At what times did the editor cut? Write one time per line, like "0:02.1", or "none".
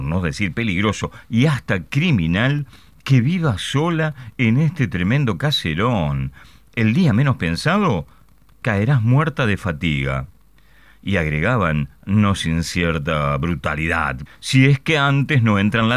0:14.3